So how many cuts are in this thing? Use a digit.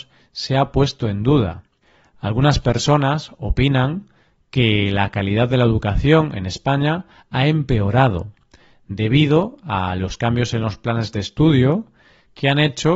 0